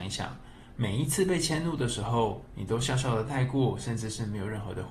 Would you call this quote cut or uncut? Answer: uncut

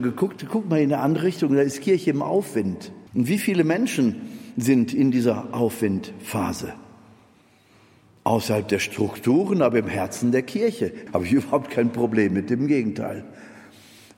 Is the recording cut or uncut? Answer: cut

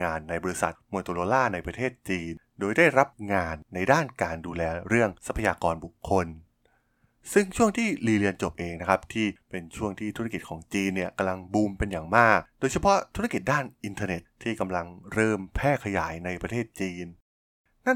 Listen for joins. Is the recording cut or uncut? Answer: uncut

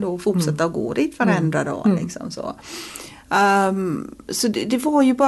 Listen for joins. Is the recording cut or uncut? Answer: uncut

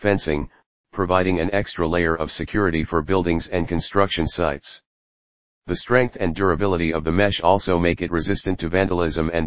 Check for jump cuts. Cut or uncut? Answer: uncut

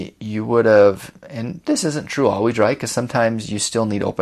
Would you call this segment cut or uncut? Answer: uncut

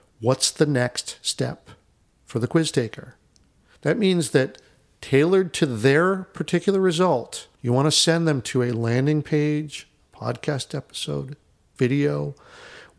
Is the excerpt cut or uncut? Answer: cut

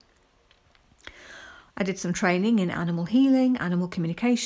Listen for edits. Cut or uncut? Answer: cut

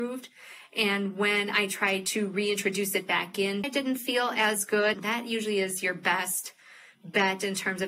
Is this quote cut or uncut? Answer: cut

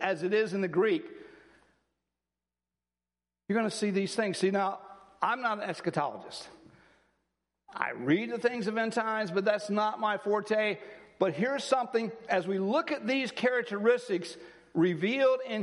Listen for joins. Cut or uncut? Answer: uncut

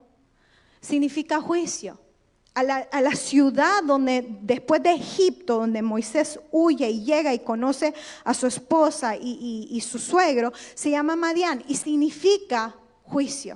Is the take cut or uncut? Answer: uncut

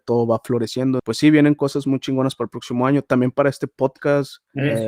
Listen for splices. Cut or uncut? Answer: cut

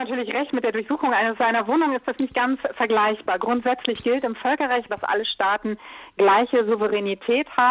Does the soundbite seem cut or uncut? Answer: cut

